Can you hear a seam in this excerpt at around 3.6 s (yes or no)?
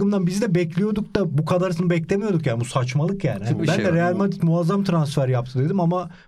yes